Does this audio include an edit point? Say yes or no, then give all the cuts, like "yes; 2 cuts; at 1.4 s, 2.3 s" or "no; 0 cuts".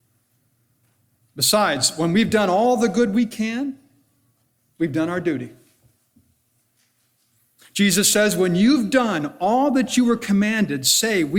no; 0 cuts